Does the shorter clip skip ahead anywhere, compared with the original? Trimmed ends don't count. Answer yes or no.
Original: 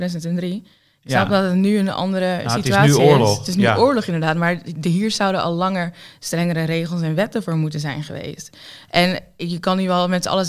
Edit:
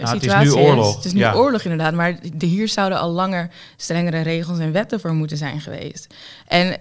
no